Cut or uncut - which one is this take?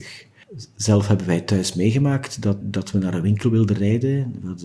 cut